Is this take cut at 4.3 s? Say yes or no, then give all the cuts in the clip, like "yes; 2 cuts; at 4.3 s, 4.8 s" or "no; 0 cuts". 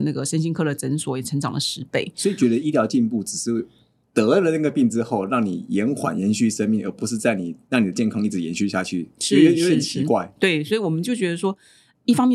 no; 0 cuts